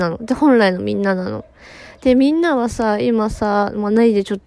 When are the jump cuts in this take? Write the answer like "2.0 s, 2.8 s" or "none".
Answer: none